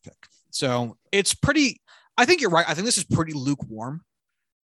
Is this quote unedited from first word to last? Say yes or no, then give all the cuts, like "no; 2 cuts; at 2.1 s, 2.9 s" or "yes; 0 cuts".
yes; 0 cuts